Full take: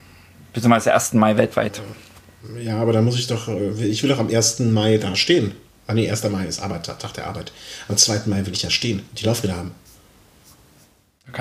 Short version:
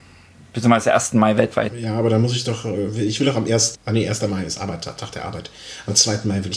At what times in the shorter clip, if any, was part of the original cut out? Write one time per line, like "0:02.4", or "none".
0:01.7
0:03.7